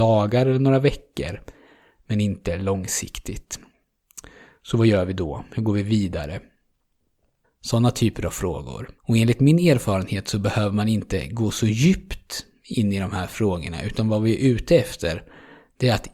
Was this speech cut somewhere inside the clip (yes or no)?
yes